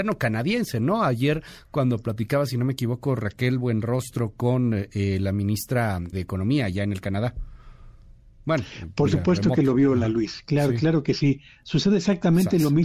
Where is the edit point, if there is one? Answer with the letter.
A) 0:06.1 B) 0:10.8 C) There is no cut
A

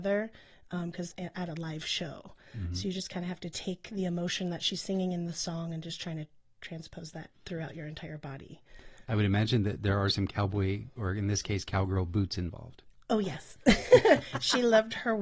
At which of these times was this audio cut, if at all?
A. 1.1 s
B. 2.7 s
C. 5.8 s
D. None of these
A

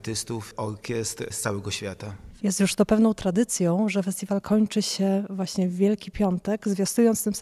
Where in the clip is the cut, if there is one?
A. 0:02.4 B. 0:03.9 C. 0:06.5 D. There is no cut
A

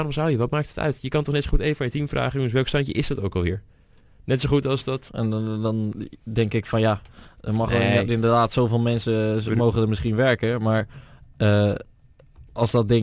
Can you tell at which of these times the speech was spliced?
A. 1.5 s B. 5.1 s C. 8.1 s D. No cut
B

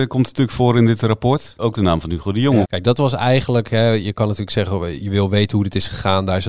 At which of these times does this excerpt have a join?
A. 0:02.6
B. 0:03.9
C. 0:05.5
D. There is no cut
A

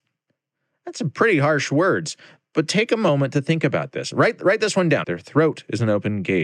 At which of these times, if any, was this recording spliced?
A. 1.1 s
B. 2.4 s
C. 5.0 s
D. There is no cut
C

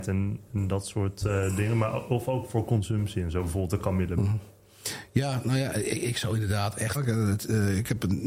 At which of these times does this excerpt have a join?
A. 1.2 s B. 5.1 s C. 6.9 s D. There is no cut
C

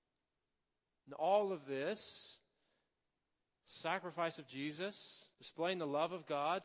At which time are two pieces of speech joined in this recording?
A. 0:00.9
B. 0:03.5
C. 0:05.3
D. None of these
C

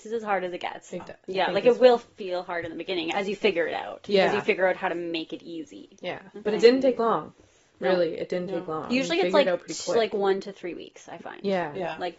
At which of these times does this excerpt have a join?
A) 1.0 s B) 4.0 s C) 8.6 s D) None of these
A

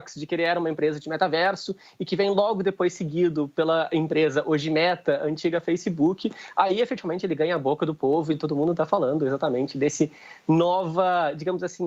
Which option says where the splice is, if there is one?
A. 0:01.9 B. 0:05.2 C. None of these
C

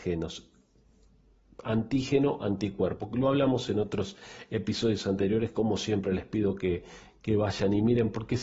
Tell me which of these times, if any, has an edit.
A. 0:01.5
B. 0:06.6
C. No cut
C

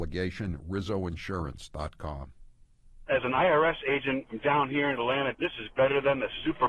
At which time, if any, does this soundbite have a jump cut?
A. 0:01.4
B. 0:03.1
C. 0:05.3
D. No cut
C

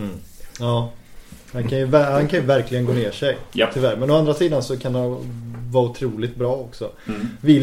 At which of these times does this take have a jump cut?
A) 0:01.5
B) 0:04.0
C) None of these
A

